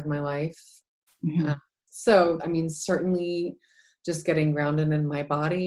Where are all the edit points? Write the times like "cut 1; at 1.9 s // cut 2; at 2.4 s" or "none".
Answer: cut 1; at 1.1 s // cut 2; at 2.4 s